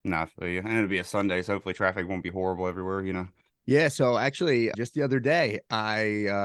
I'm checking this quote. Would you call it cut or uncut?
cut